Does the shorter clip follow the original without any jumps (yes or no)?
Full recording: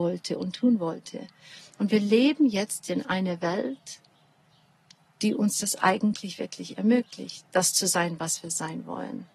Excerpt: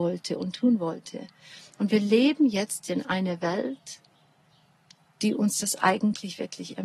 yes